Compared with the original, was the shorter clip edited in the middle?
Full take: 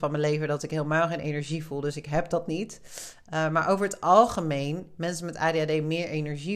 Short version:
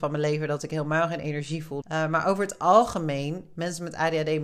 yes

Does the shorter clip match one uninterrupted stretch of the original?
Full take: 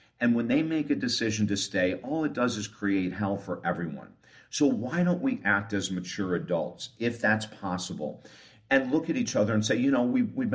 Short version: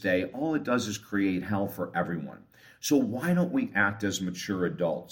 yes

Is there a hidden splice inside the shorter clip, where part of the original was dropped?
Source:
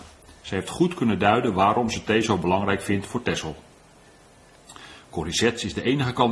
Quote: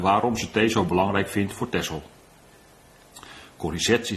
no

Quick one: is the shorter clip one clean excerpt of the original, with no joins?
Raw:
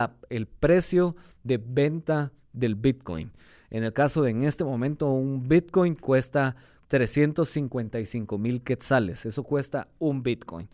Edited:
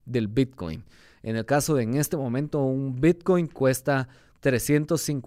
yes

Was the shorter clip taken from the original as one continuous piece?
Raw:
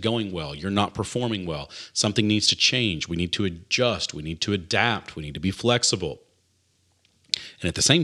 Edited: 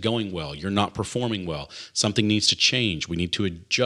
yes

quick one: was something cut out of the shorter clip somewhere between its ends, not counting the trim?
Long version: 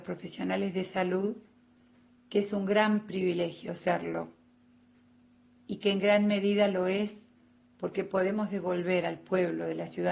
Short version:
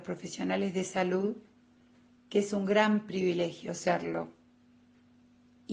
no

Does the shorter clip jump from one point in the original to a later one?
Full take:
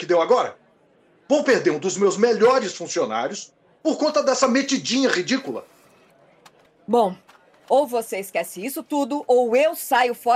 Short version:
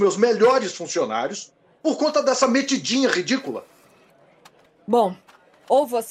no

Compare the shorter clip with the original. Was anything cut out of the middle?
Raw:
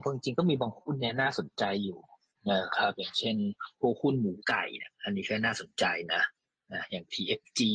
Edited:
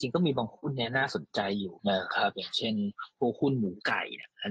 yes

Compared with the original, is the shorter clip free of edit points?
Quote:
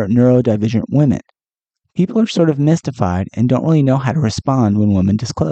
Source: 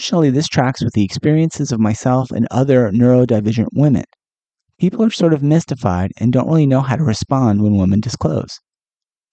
yes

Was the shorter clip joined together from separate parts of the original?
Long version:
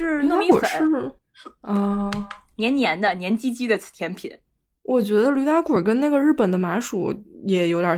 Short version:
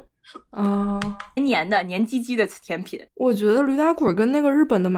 yes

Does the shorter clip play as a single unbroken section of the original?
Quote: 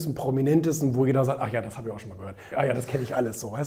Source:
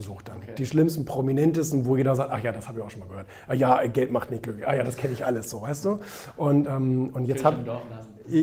no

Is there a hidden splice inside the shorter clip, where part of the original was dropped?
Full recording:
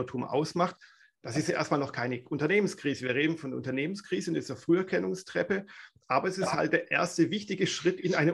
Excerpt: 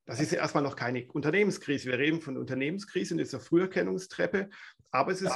no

